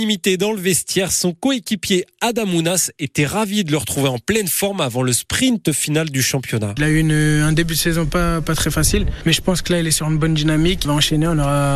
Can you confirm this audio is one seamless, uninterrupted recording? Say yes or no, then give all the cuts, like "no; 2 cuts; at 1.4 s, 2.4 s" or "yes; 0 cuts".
yes; 0 cuts